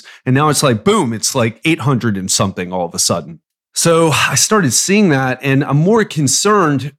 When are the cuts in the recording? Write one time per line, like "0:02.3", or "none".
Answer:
none